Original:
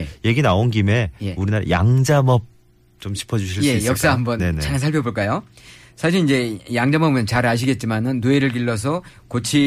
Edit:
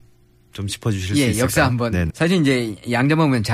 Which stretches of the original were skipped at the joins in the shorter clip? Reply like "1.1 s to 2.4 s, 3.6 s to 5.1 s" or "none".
4.6 s to 5.9 s